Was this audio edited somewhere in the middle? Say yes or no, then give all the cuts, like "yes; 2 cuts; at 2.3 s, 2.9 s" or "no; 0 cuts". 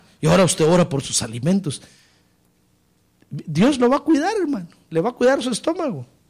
no; 0 cuts